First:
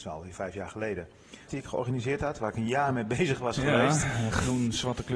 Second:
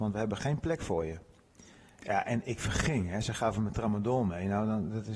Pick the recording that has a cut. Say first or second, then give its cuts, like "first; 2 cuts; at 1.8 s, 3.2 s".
first; 1 cut; at 1.5 s